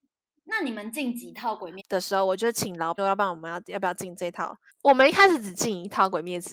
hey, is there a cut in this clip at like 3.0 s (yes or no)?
yes